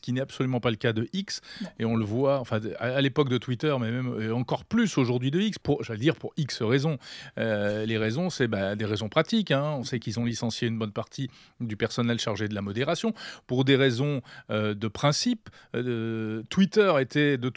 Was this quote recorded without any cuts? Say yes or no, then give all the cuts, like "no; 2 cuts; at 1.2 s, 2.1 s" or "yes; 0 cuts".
yes; 0 cuts